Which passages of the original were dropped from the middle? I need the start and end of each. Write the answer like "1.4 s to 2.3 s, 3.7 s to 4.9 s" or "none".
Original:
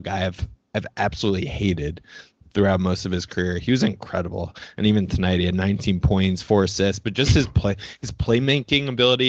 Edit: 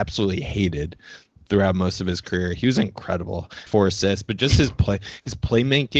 4.7 s to 6.4 s